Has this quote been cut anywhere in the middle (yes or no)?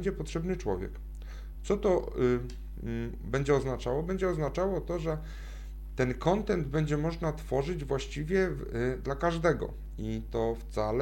no